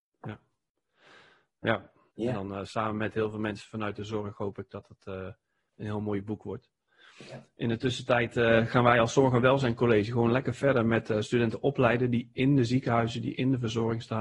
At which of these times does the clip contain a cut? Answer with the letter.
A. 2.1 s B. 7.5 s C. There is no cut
A